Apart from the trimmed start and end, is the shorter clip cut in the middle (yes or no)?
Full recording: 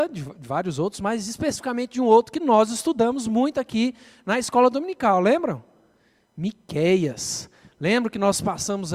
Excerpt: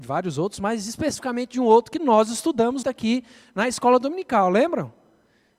yes